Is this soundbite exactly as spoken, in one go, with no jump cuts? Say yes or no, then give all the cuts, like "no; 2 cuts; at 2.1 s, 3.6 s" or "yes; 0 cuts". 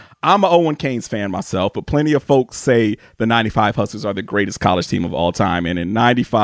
yes; 0 cuts